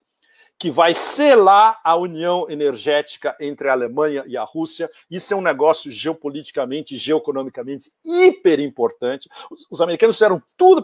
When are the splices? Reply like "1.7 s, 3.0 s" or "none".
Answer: none